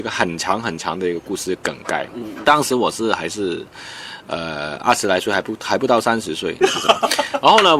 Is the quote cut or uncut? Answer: cut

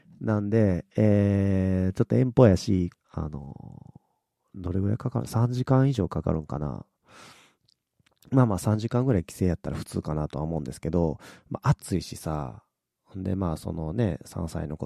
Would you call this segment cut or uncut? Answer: cut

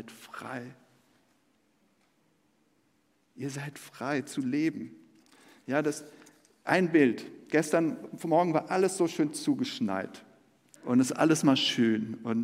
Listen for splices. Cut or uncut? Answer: cut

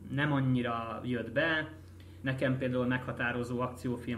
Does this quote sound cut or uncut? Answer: cut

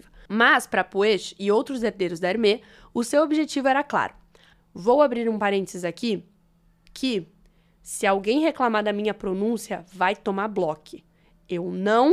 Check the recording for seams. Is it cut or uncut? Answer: cut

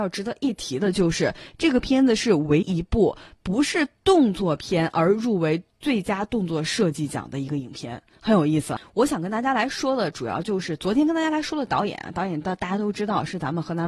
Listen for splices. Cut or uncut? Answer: cut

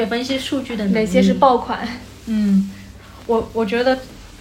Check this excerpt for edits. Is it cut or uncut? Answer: uncut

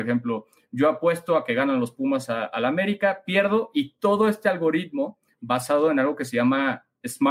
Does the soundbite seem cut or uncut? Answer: uncut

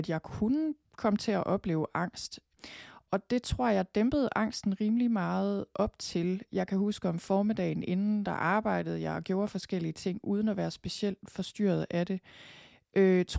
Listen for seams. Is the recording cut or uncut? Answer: uncut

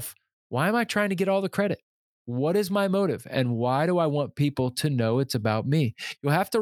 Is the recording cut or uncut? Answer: uncut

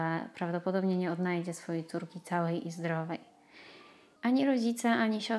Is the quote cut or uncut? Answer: cut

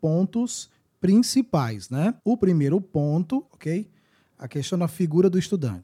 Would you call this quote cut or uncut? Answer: cut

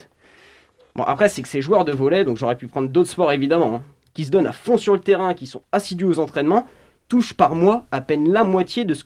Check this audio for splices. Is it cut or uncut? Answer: cut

